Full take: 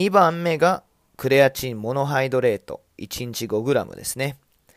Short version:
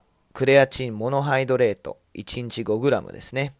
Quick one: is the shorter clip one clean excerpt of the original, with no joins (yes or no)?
yes